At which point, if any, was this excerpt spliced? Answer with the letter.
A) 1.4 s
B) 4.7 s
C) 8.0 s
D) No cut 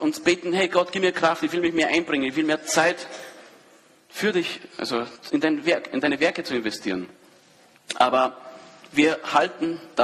D